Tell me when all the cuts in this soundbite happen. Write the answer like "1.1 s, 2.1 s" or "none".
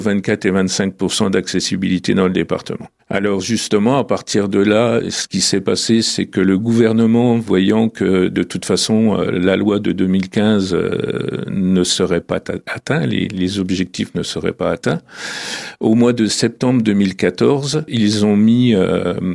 17.9 s

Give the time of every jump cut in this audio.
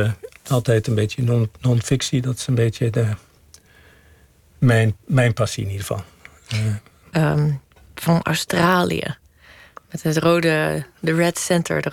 7.1 s

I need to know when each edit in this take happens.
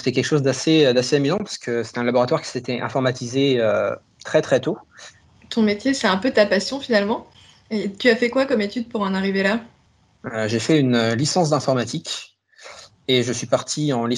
5.3 s

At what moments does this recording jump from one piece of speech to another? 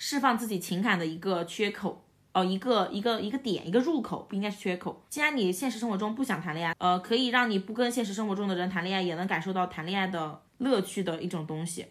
5.1 s, 6.7 s, 10.5 s

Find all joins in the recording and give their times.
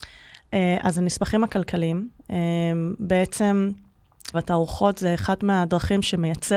2.2 s, 4.3 s

